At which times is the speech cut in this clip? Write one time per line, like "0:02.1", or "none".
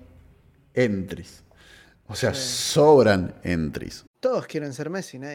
0:04.1